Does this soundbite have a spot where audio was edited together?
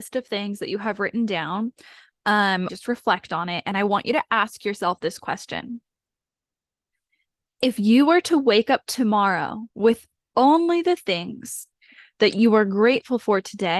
yes; 2 cuts; at 2.7 s, 9.7 s

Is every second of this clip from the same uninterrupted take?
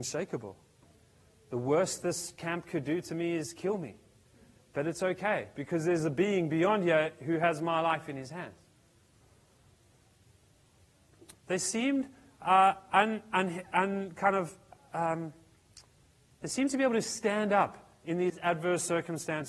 no; 1 cut; at 11.3 s

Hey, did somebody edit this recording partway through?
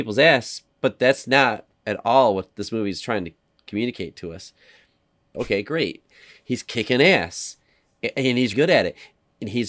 yes; 2 cuts; at 5.3 s, 8.5 s

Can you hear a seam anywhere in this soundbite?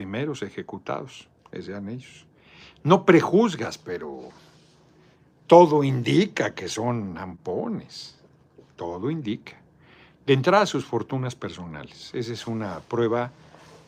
no; 0 cuts

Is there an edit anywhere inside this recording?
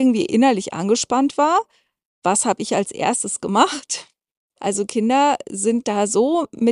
yes; 1 cut; at 4.6 s

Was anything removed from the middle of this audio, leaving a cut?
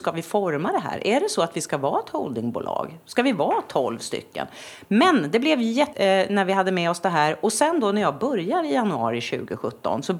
yes; 1 cut; at 5.9 s

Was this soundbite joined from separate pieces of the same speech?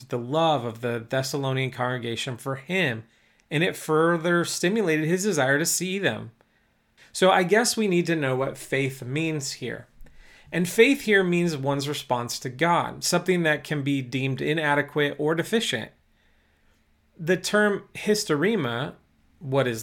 yes; 1 cut; at 7.0 s

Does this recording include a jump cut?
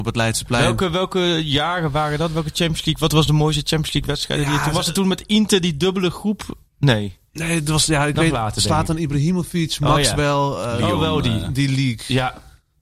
no; 0 cuts

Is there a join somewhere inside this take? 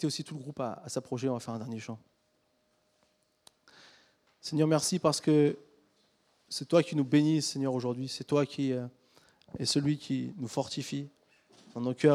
no; 0 cuts

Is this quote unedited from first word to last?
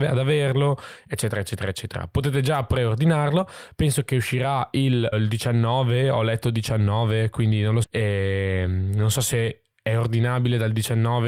no; 2 cuts; at 5.1 s, 7.8 s

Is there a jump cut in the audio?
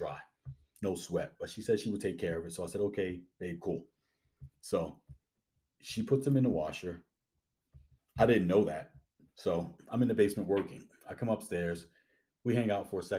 no; 0 cuts

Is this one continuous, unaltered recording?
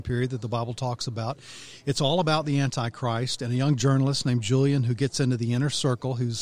yes; 0 cuts

